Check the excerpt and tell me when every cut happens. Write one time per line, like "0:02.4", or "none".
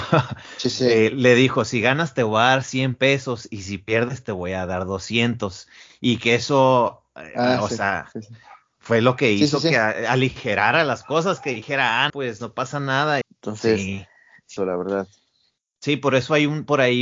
0:12.1
0:13.2
0:14.6